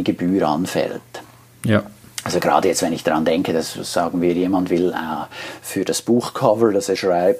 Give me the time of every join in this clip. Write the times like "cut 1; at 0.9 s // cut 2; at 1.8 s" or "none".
none